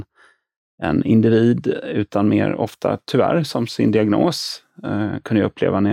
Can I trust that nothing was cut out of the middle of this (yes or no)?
yes